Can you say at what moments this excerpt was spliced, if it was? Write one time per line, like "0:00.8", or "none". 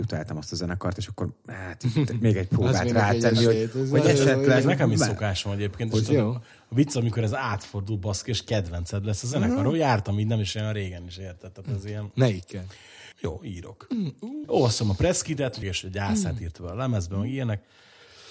0:13.1
0:14.4
0:15.6